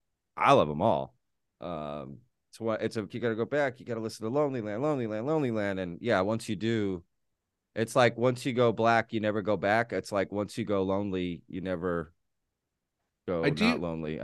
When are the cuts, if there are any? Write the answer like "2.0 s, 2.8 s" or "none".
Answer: 3.1 s